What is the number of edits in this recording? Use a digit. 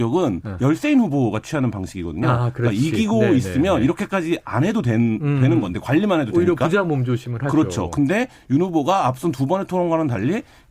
0